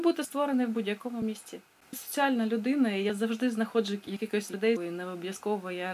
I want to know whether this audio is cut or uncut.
cut